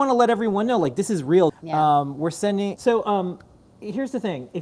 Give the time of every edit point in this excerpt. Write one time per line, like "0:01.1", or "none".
0:01.5
0:02.8